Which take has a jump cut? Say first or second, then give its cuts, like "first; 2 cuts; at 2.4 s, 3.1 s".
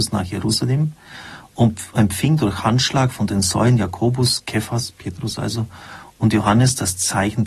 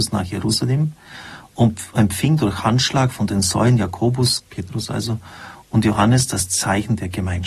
second; 1 cut; at 4.4 s